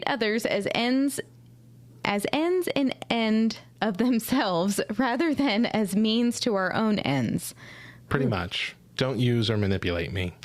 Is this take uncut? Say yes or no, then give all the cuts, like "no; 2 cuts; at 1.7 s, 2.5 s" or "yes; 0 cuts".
yes; 0 cuts